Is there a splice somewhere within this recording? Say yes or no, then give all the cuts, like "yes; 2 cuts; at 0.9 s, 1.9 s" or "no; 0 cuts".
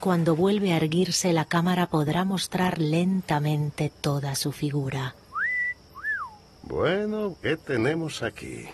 yes; 1 cut; at 7.3 s